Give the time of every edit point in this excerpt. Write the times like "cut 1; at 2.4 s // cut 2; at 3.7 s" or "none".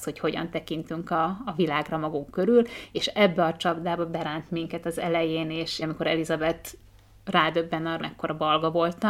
cut 1; at 5.8 s // cut 2; at 8.0 s